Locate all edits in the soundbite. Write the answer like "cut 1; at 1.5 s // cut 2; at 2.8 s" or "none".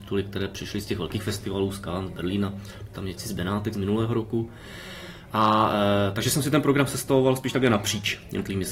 none

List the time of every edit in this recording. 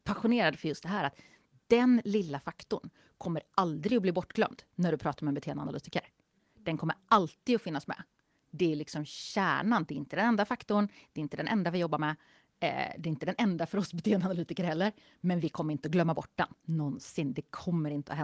none

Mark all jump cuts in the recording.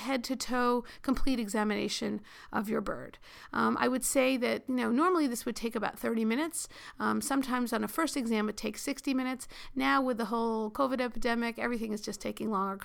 none

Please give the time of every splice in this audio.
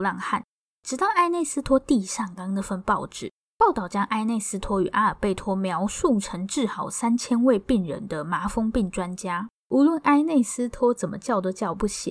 cut 1; at 2.4 s // cut 2; at 9.6 s

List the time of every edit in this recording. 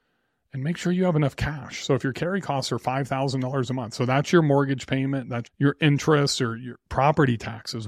cut 1; at 5.5 s

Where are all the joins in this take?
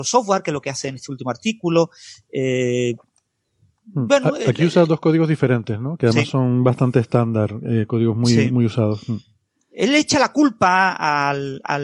none

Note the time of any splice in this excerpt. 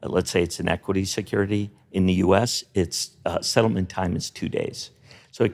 none

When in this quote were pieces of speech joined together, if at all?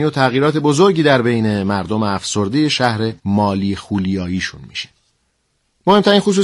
cut 1; at 3.2 s

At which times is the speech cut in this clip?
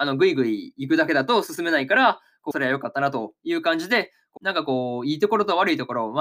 cut 1; at 2.5 s // cut 2; at 4.4 s

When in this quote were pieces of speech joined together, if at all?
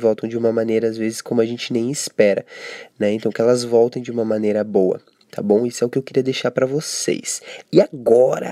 none

